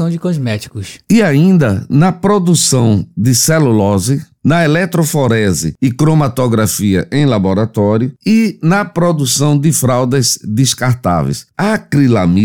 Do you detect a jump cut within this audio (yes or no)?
yes